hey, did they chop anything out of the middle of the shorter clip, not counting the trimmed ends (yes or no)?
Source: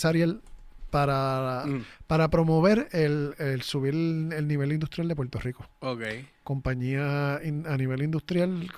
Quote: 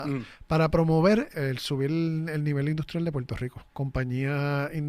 yes